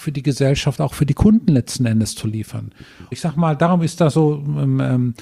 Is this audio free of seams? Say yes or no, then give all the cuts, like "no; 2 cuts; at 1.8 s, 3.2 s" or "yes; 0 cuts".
no; 1 cut; at 3.1 s